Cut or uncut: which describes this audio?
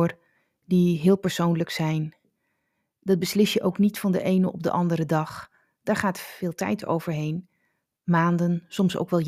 uncut